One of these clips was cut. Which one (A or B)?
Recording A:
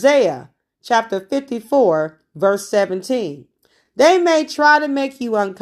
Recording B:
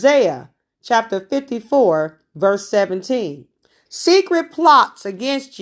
B